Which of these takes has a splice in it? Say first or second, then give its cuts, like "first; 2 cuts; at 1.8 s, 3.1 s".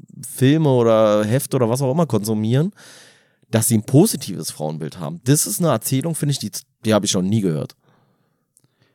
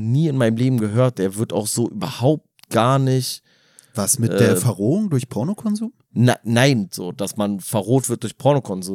second; 1 cut; at 6.9 s